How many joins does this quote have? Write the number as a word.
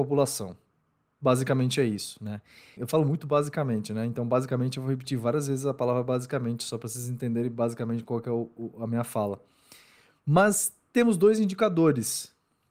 one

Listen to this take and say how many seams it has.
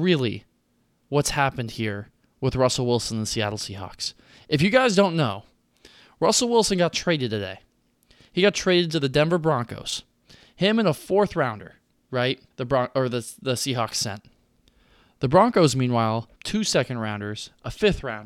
two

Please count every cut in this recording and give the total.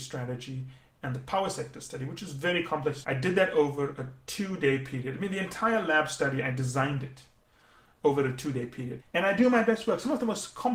two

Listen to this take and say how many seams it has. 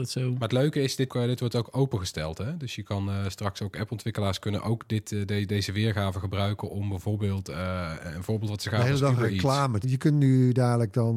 two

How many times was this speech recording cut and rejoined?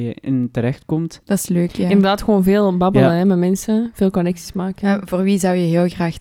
one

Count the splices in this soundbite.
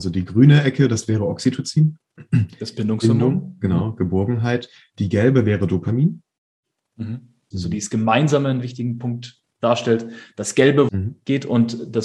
two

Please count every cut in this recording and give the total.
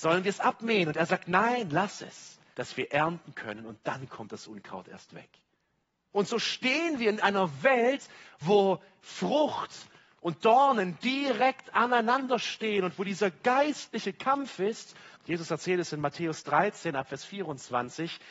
three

